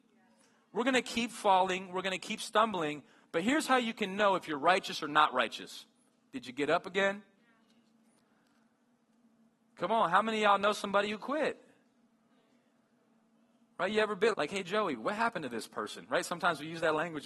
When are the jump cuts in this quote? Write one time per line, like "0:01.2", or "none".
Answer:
0:14.3